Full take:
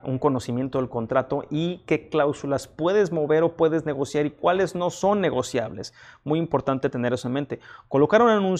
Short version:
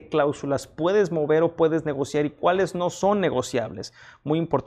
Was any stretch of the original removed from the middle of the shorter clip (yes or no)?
no